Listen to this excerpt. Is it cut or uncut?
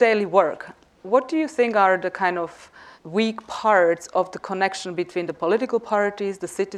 cut